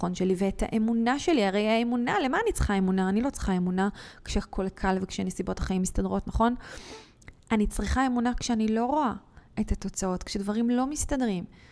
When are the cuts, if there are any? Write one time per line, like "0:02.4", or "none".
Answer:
none